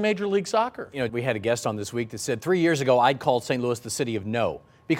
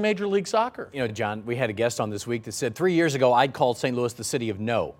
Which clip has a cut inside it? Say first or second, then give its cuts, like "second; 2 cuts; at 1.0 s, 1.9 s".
first; 1 cut; at 1.1 s